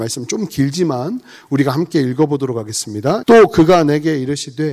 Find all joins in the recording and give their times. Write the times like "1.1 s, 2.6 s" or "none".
3.2 s